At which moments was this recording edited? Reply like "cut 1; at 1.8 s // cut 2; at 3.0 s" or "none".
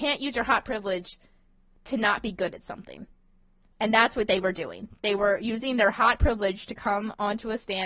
none